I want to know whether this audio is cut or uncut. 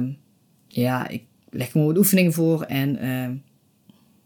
uncut